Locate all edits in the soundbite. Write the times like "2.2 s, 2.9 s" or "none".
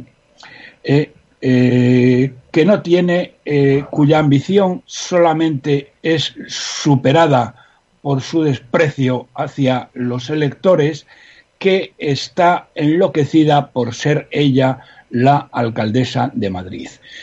6.0 s